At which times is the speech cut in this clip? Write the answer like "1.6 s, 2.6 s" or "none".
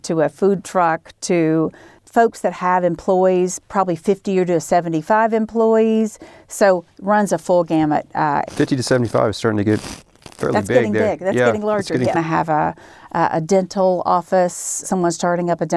8.5 s, 12.1 s, 14.8 s